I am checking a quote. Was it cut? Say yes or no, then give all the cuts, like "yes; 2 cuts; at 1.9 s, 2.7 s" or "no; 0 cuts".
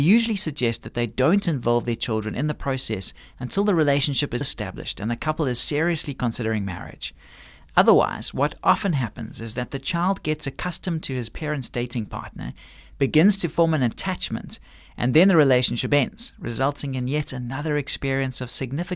yes; 1 cut; at 4.4 s